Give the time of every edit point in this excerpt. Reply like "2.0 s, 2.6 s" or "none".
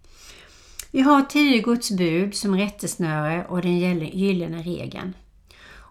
none